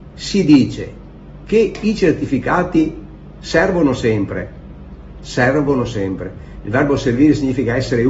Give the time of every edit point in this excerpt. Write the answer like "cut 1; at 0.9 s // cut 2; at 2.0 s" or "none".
cut 1; at 5.2 s